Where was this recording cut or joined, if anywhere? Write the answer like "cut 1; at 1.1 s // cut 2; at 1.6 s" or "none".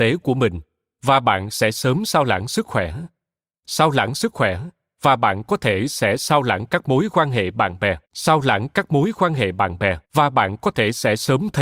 cut 1; at 8.0 s // cut 2; at 10.0 s

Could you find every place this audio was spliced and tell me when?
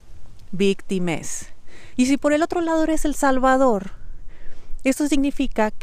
cut 1; at 1.9 s

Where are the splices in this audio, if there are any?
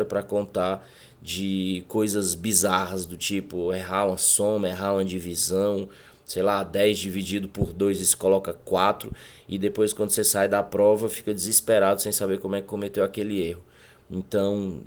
none

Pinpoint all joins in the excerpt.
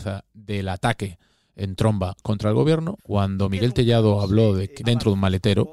cut 1; at 3.0 s // cut 2; at 4.8 s

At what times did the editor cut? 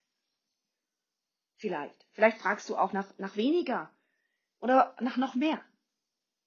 none

